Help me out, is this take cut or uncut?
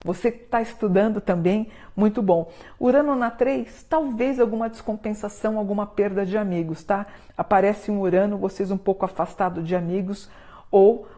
uncut